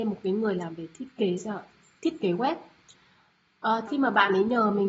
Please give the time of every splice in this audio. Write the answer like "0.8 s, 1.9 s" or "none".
3.9 s